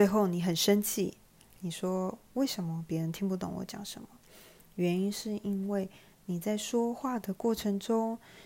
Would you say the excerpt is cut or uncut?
uncut